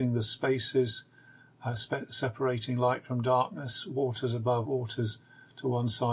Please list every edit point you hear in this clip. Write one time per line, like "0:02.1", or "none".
0:04.6